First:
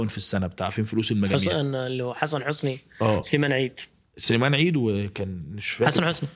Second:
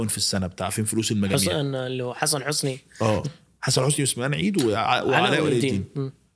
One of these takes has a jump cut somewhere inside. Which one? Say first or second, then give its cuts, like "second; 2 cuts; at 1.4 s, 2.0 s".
second; 1 cut; at 3.2 s